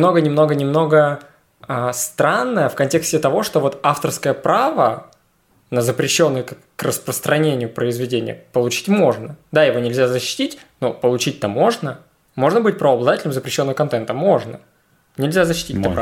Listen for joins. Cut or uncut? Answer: uncut